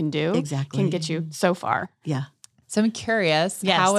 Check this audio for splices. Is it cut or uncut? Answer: uncut